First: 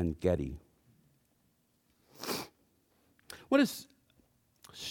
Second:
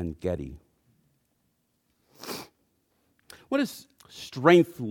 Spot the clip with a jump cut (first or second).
second